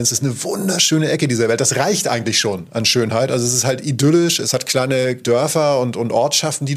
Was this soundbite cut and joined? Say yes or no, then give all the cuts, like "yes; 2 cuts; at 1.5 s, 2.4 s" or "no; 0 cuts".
no; 0 cuts